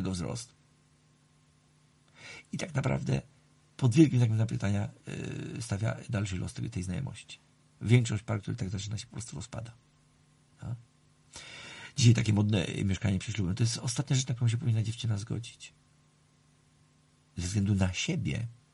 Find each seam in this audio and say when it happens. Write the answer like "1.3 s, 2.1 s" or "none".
none

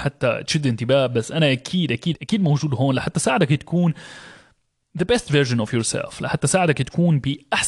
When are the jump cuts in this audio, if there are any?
2.1 s

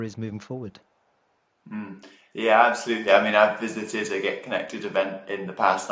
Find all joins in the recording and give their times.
none

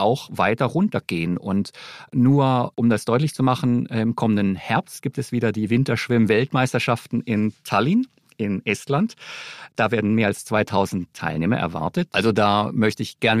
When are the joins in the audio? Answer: 12.1 s

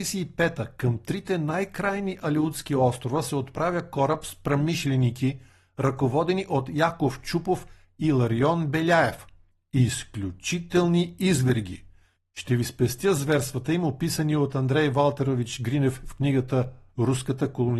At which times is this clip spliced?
none

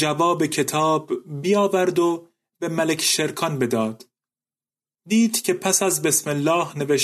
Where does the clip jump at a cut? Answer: 4.9 s

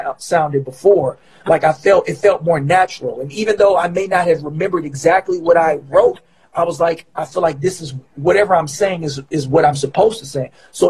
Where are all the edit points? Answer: none

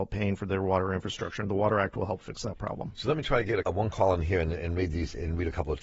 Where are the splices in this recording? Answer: 3.6 s

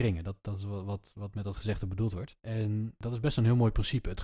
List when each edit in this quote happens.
2.4 s

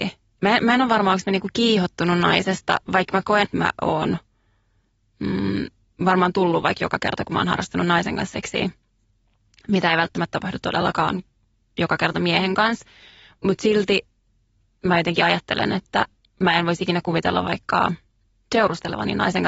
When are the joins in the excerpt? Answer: 3.4 s

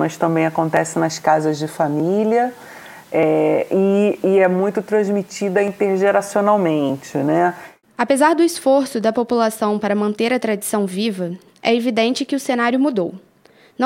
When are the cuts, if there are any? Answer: none

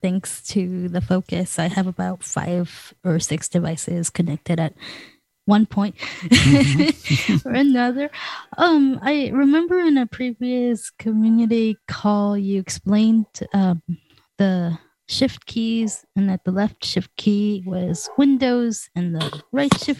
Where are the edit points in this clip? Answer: none

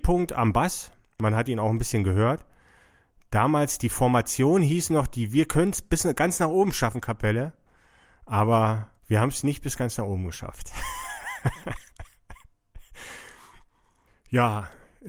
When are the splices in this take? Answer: 9.0 s

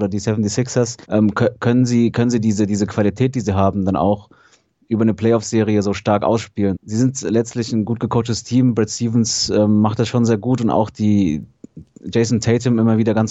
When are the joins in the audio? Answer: 1.0 s, 6.7 s

